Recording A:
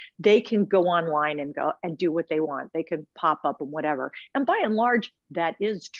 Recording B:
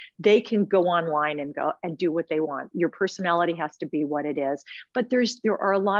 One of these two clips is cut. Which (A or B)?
B